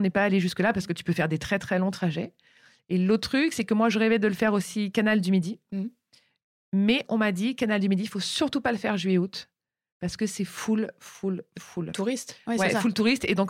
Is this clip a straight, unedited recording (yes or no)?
yes